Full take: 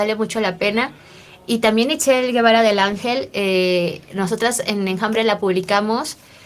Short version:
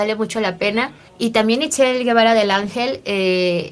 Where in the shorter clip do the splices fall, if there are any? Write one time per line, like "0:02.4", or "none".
0:01.1

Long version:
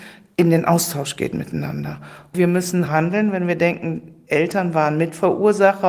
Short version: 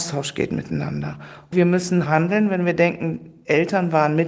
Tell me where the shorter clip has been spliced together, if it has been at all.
none

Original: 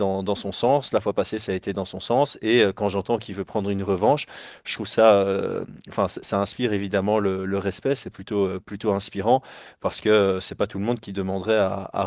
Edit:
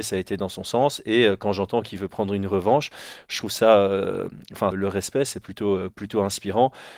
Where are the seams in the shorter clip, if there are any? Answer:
0:04.7

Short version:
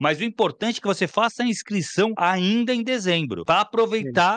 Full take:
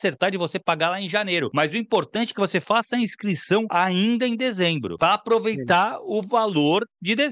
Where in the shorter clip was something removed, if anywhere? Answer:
none

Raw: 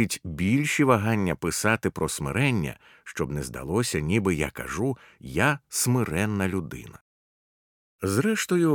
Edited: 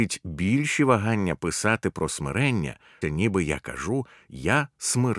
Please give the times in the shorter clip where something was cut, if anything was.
0:03.0

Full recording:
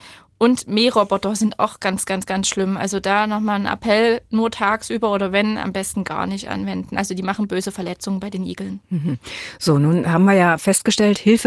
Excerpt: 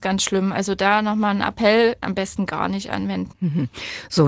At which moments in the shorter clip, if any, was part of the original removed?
0:02.0
0:03.3

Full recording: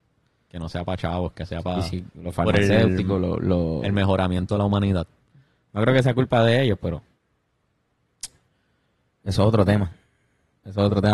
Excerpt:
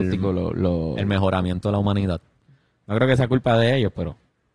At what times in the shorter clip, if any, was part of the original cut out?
none

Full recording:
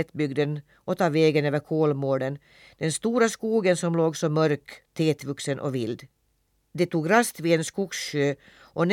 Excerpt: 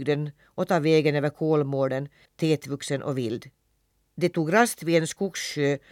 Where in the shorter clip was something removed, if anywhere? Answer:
0:02.3

